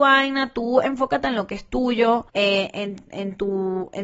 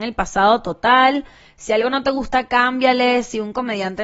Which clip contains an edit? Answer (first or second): first